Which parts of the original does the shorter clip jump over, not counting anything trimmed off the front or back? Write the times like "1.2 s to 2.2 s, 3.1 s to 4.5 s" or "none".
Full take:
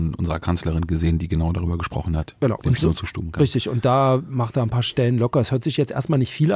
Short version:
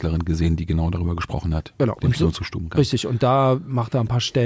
none